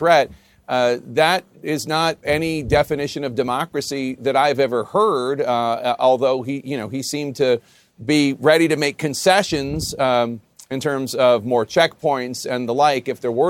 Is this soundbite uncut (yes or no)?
no